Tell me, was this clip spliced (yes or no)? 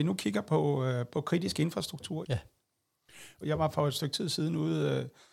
yes